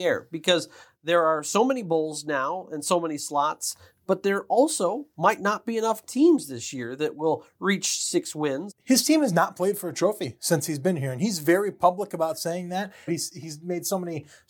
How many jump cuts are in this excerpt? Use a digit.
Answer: 2